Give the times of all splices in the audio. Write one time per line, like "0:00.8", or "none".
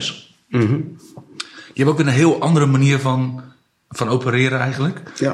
none